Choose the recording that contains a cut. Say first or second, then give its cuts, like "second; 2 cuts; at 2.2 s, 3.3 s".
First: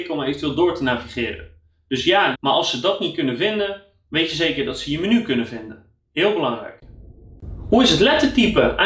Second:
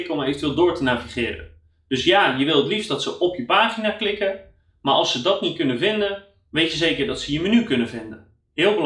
first; 1 cut; at 2.3 s